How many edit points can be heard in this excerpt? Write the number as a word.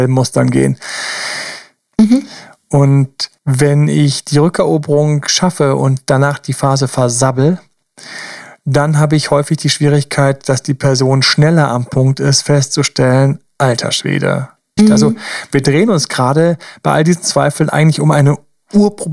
three